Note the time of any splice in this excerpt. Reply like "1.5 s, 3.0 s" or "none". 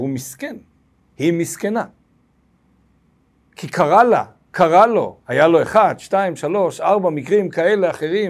none